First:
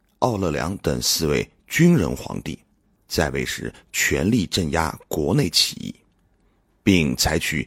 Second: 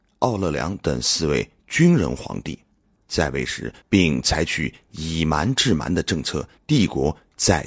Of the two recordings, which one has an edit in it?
second; 2 cuts; at 3.8 s, 6.6 s

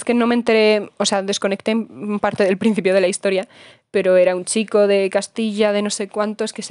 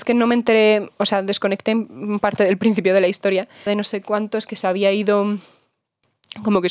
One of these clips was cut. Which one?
second; 1 cut; at 3.7 s

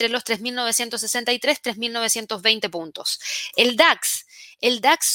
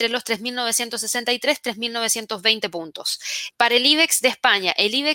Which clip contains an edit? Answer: second; 1 cut; at 3.5 s

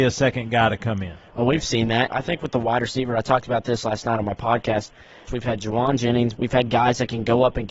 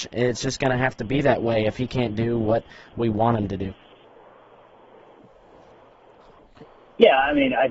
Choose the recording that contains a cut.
first; 3 cuts; at 2.1 s, 5.3 s, 6.3 s

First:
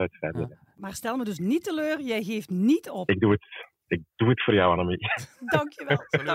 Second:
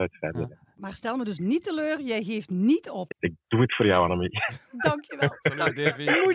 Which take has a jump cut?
second; 1 cut; at 3.1 s

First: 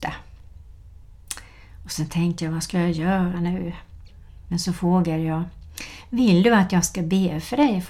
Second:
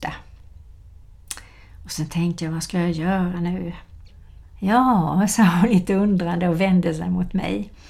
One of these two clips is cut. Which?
second; 1 cut; at 4.4 s

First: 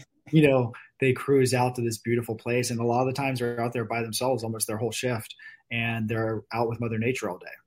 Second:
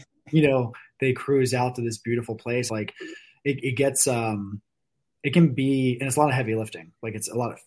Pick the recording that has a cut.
second; 1 cut; at 2.7 s

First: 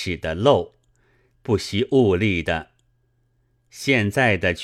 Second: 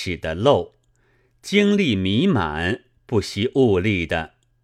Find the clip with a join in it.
first; 1 cut; at 1.4 s

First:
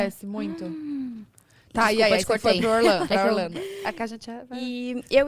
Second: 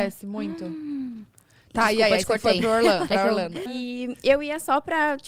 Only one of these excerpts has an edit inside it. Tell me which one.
second; 1 cut; at 3.7 s

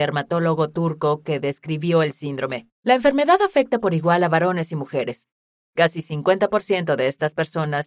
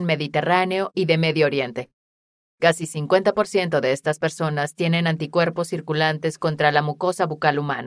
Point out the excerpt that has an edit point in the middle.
first; 2 cuts; at 2.7 s, 5.5 s

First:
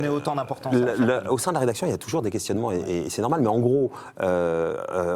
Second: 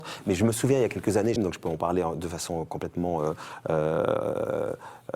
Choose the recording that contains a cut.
second; 1 cut; at 1.4 s

